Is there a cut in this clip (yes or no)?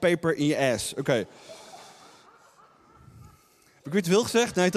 no